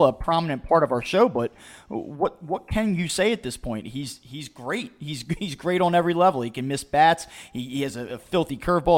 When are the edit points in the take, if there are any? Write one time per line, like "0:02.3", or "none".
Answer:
none

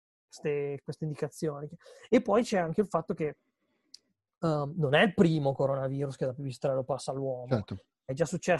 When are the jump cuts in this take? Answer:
none

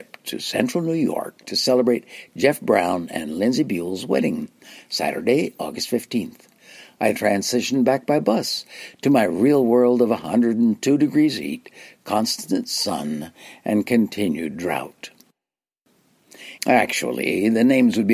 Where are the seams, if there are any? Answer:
0:07.1
0:16.6

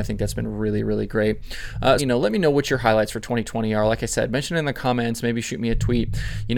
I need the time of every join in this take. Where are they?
0:02.0

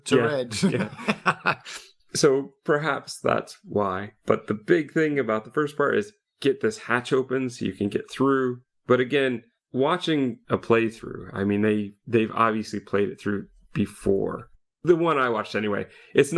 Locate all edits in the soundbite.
none

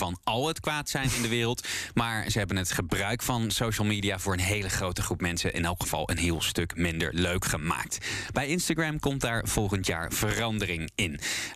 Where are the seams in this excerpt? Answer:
none

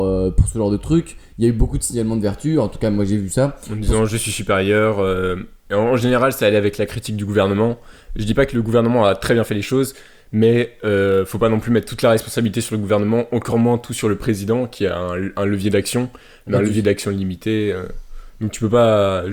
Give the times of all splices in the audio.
none

